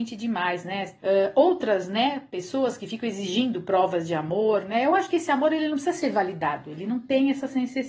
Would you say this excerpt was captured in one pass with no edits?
no; 1 cut; at 1.0 s

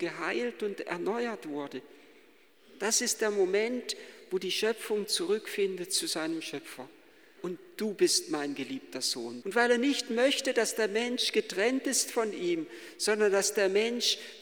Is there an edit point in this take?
yes; 2 cuts; at 7.4 s, 9.4 s

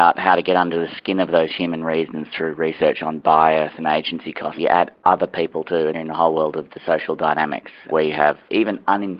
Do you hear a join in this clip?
yes; 2 cuts; at 4.6 s, 5.9 s

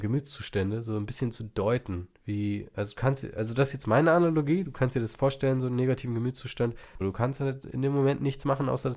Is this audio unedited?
no; 1 cut; at 7.0 s

